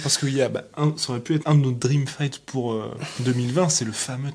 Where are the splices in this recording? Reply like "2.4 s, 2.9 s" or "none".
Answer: 1.4 s